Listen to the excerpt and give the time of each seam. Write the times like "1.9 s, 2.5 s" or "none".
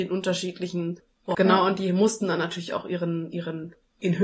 1.3 s